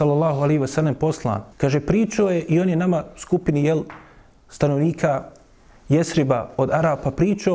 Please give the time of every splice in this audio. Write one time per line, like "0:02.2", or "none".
0:01.5